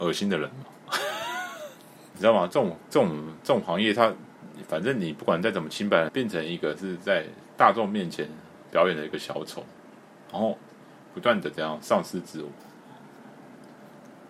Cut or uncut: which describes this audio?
cut